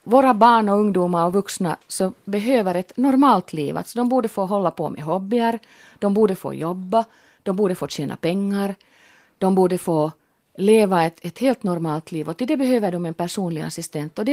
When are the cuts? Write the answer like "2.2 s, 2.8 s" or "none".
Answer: none